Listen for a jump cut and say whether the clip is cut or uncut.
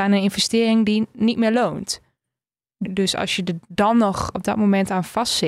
cut